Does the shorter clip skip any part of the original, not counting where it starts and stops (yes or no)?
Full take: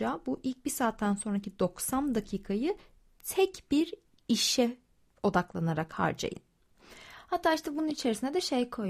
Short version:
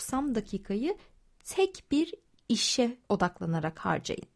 yes